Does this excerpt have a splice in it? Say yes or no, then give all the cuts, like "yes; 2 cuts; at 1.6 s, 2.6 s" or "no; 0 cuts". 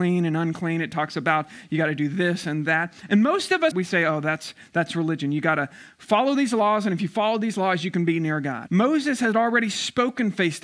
yes; 2 cuts; at 3.7 s, 8.7 s